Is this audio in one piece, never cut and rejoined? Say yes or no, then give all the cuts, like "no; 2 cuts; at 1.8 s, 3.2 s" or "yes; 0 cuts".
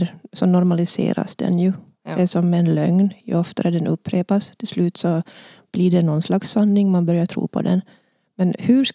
yes; 0 cuts